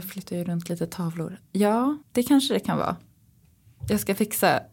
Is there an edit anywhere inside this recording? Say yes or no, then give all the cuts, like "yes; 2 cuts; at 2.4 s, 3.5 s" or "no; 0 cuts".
yes; 1 cut; at 2.0 s